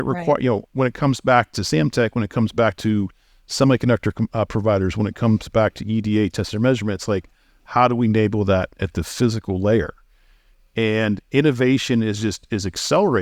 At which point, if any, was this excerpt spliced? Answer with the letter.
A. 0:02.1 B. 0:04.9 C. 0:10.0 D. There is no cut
D